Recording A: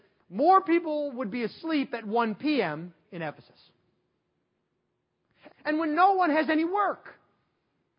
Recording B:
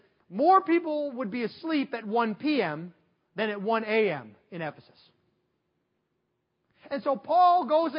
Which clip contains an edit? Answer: A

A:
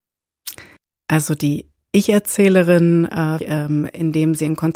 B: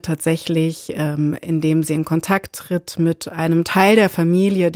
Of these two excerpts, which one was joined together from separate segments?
A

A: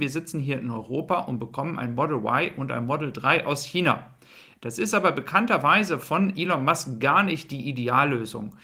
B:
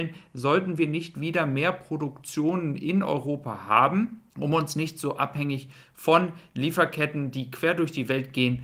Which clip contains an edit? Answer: B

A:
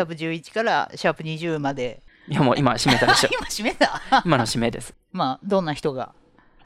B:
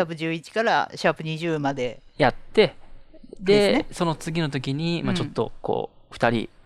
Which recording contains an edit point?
A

